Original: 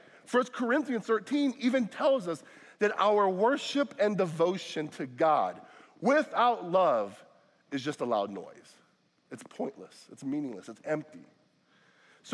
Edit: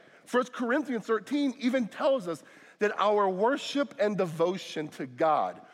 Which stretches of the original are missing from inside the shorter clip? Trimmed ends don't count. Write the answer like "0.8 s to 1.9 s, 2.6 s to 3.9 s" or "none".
none